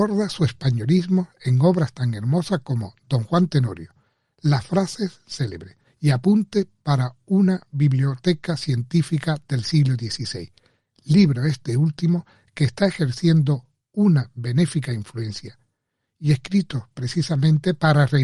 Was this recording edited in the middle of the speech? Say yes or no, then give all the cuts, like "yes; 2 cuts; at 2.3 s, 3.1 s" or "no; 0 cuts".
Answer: yes; 1 cut; at 5.8 s